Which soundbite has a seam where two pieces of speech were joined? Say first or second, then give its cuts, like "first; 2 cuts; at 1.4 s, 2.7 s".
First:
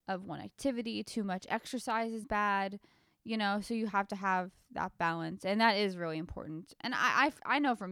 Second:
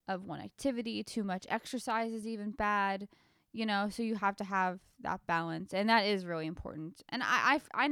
first; 1 cut; at 2.2 s